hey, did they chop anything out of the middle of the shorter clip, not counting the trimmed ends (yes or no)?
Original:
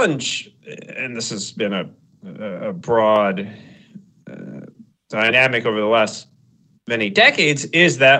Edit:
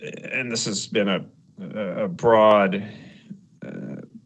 no